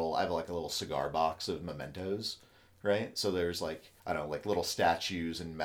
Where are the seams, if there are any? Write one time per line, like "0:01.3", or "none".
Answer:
0:04.0